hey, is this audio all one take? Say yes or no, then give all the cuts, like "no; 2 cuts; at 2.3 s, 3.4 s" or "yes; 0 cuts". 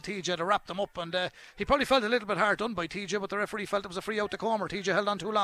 yes; 0 cuts